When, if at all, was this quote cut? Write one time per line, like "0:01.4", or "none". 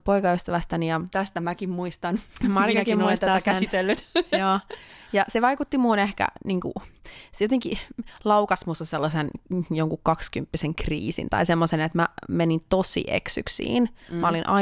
none